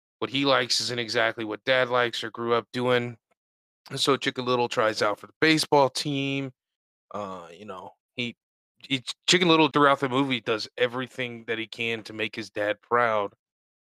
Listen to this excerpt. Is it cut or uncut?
cut